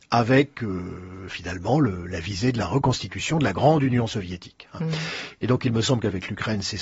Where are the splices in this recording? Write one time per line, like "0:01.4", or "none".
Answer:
none